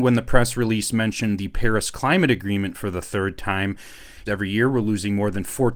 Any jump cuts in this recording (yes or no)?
yes